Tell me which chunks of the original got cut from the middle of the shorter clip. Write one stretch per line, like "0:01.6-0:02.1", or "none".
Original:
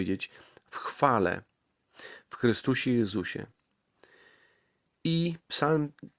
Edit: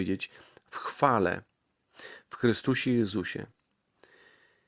none